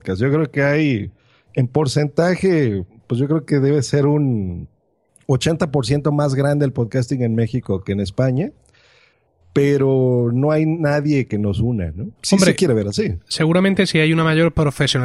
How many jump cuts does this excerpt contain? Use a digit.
1